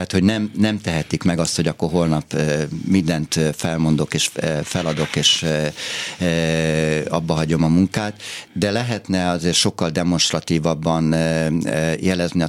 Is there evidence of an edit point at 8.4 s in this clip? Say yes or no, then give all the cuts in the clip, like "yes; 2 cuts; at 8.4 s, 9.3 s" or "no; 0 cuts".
yes; 1 cut; at 8.4 s